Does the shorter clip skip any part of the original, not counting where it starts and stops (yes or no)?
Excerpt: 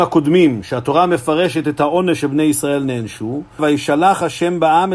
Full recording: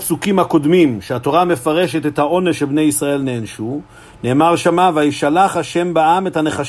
yes